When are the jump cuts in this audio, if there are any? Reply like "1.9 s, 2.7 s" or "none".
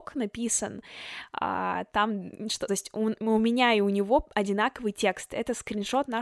2.7 s